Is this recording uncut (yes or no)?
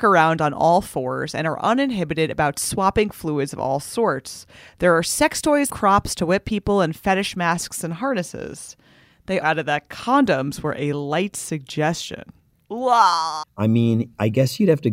no